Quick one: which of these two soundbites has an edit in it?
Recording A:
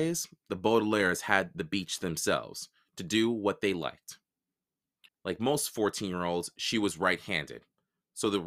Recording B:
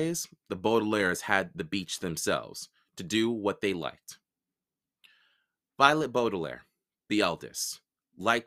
A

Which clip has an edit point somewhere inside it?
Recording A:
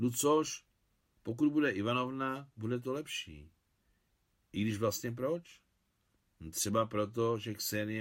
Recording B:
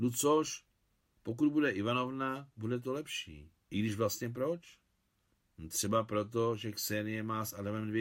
B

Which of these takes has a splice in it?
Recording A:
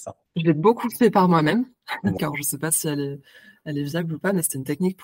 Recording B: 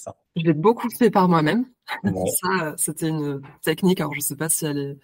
A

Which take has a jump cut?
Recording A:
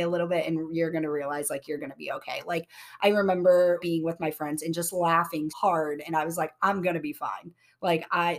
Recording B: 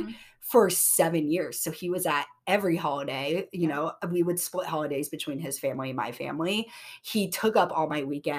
A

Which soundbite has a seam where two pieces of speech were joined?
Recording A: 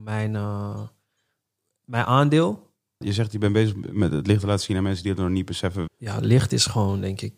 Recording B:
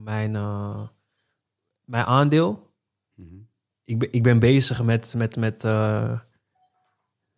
A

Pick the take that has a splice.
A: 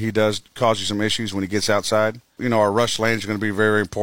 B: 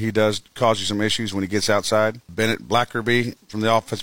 B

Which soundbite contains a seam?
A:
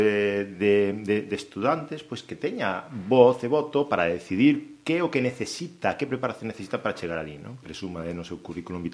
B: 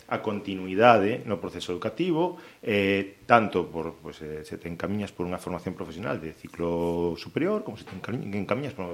A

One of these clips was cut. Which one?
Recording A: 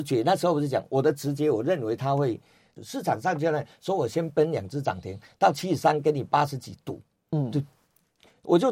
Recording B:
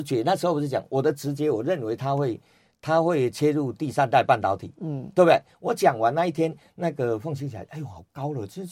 A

